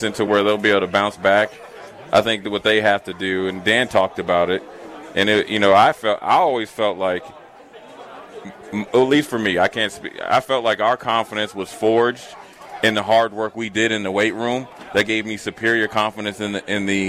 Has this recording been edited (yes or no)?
no